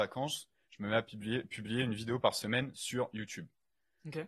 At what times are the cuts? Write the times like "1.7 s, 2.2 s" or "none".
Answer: none